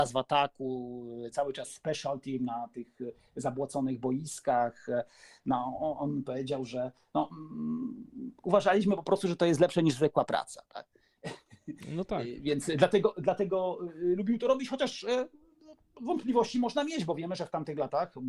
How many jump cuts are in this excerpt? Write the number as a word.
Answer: zero